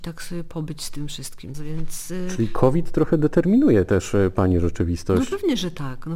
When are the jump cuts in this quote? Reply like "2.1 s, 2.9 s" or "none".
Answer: 1.5 s